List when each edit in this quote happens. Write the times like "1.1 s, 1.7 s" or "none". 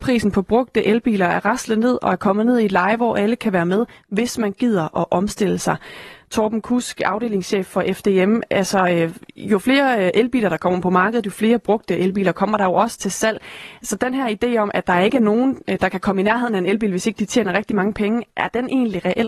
none

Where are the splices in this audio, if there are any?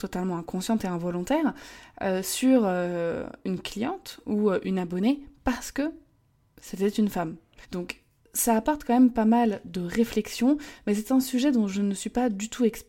7.6 s

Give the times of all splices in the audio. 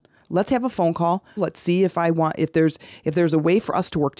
1.4 s

